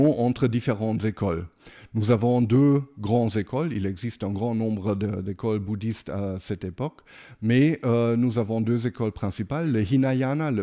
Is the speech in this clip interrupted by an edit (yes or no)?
no